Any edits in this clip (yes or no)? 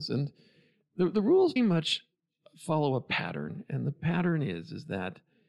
yes